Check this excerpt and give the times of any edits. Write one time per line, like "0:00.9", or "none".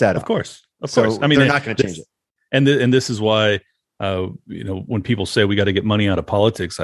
none

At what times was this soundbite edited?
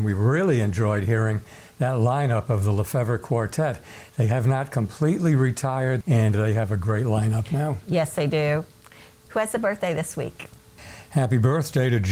0:06.0

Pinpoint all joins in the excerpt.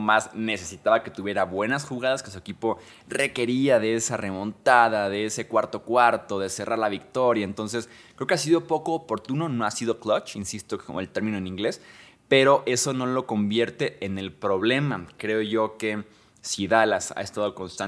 none

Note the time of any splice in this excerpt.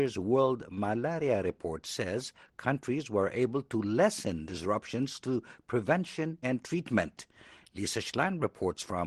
0:06.4

